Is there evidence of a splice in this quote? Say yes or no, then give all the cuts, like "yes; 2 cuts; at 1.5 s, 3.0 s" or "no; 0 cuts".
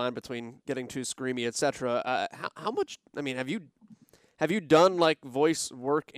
no; 0 cuts